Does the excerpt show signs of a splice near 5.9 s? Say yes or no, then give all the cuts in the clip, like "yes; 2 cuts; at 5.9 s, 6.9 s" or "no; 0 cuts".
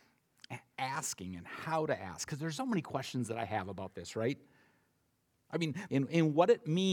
yes; 2 cuts; at 2.6 s, 5.9 s